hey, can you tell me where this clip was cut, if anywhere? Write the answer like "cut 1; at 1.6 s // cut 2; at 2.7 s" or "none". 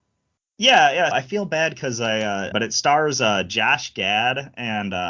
cut 1; at 1.1 s // cut 2; at 2.5 s